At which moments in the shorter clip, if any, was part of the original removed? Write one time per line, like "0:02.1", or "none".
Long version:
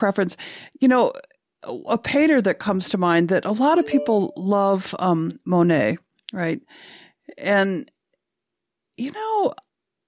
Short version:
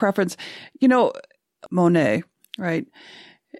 0:01.7